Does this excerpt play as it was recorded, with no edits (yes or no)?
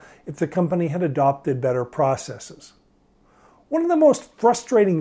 yes